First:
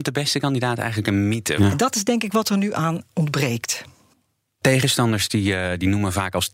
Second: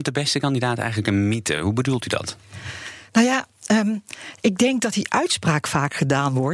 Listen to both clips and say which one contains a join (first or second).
first